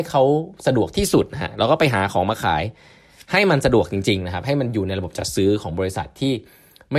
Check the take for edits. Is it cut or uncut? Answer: uncut